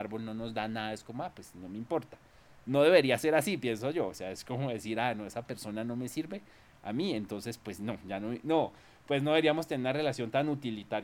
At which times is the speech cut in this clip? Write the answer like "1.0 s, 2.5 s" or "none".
none